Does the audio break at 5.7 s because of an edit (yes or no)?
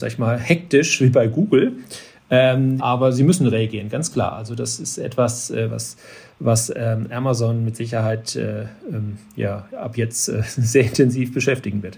no